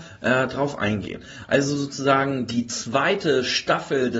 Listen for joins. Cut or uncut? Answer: uncut